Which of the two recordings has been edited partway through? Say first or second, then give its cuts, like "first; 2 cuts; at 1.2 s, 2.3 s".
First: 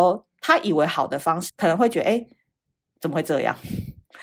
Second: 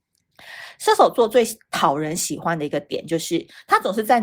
first; 1 cut; at 1.5 s